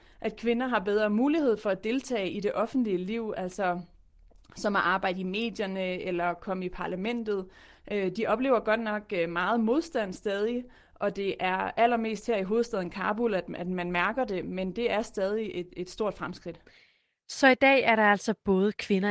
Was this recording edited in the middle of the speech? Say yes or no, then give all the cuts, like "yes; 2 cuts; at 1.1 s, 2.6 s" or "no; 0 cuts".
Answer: no; 0 cuts